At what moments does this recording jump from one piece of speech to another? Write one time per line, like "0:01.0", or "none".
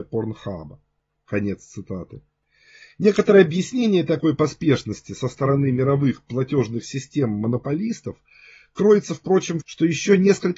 0:01.2
0:09.6